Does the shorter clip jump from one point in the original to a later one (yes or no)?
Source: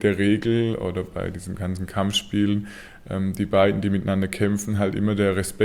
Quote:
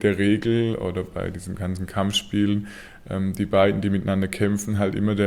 no